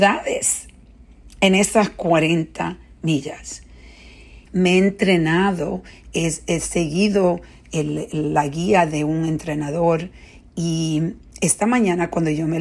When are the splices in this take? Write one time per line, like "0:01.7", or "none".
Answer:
0:04.4